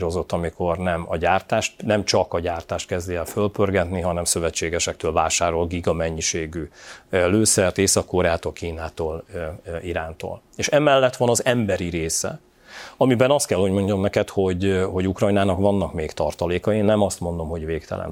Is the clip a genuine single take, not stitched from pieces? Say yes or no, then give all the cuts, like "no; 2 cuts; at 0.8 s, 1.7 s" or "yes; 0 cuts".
yes; 0 cuts